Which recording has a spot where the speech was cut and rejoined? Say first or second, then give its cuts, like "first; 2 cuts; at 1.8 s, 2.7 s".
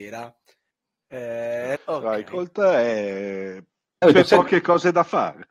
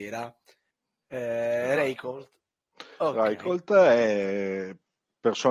first; 2 cuts; at 1.8 s, 4.0 s